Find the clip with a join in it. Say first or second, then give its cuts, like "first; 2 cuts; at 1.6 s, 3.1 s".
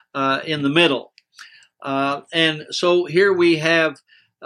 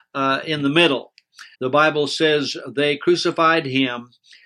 second; 1 cut; at 1.5 s